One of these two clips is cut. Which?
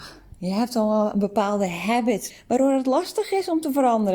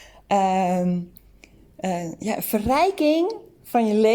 first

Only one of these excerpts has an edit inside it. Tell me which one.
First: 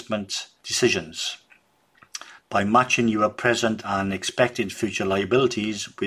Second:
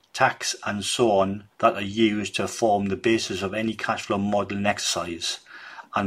second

